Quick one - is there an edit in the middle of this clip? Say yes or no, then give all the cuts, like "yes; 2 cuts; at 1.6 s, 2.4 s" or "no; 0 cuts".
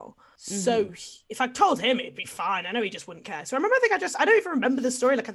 no; 0 cuts